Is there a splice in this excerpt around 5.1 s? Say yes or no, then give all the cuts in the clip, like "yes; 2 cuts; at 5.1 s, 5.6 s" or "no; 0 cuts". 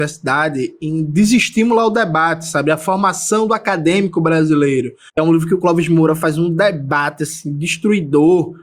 yes; 1 cut; at 5.1 s